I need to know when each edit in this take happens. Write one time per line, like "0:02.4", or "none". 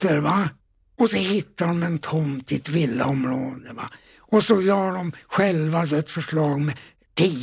none